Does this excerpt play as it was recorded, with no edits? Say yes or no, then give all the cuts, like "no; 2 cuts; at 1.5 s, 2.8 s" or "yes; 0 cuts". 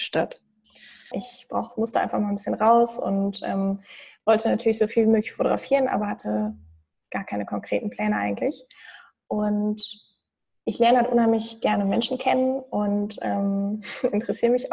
no; 1 cut; at 1.1 s